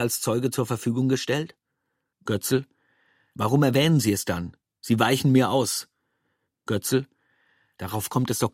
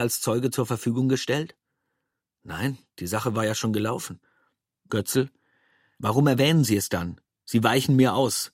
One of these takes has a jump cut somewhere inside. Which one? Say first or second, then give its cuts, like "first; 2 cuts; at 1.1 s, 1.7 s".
first; 2 cuts; at 2.1 s, 6.5 s